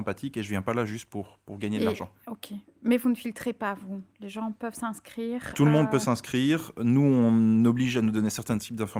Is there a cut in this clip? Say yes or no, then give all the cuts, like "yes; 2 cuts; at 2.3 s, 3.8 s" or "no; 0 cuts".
no; 0 cuts